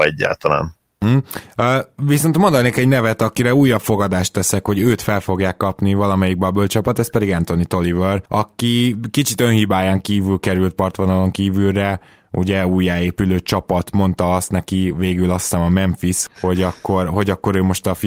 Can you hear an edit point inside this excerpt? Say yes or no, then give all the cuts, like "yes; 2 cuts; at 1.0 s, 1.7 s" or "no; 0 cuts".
yes; 2 cuts; at 8.3 s, 16.3 s